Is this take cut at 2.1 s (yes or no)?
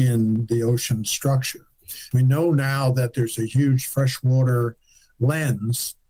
yes